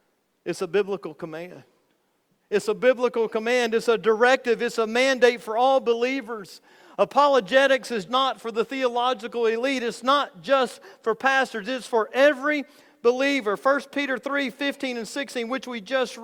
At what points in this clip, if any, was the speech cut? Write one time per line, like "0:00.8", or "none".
0:08.1